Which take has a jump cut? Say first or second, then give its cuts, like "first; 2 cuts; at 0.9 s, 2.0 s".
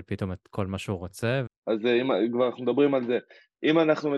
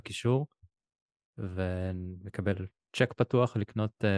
first; 1 cut; at 1.5 s